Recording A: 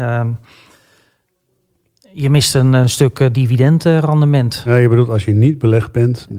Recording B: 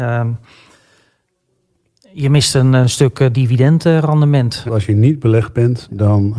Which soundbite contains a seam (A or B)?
B